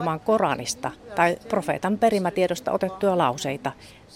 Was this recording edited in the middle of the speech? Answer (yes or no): no